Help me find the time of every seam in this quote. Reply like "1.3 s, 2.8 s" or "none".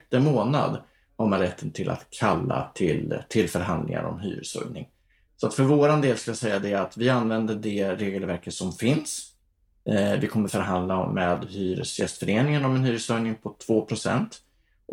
none